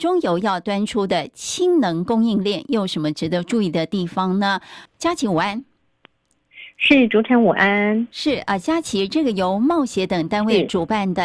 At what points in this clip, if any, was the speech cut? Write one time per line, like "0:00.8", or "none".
0:04.9